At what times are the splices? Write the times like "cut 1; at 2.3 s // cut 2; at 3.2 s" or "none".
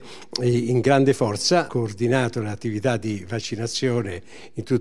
cut 1; at 1.7 s